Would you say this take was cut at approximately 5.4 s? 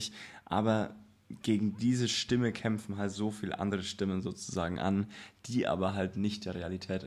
no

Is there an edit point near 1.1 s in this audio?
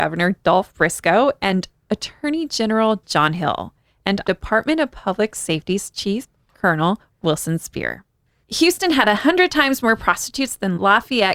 no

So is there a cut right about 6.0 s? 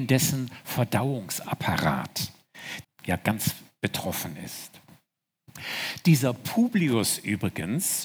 no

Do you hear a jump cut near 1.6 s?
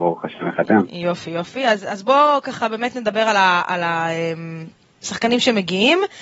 no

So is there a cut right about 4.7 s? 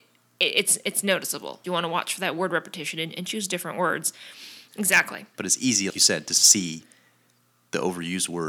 yes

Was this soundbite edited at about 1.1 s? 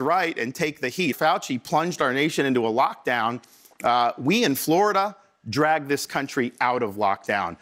yes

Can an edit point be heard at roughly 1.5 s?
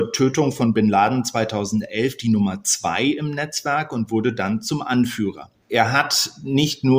no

